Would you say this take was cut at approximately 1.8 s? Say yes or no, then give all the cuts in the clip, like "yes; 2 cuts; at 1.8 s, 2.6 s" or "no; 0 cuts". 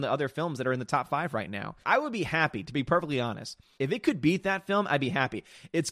yes; 2 cuts; at 1.8 s, 3.8 s